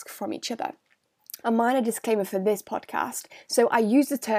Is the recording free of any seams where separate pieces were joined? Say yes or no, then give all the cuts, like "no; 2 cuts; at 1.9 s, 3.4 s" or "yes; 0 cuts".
no; 1 cut; at 1.4 s